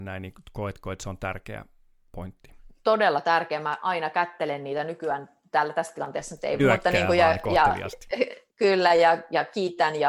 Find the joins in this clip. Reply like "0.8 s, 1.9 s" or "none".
6.6 s